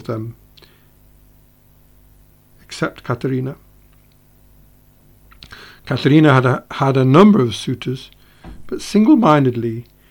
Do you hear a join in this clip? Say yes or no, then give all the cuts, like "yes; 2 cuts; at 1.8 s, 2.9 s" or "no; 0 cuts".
no; 0 cuts